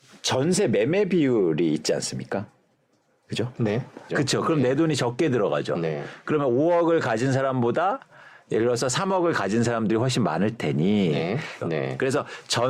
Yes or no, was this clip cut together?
yes